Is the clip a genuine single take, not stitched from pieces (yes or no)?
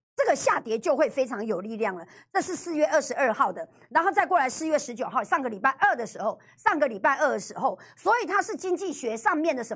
yes